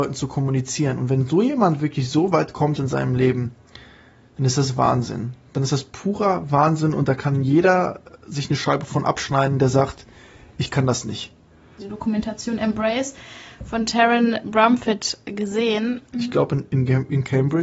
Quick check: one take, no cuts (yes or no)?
no